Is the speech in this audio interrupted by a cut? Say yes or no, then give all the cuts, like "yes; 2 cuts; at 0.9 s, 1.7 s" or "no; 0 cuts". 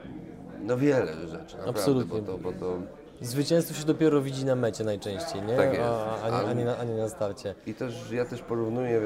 no; 0 cuts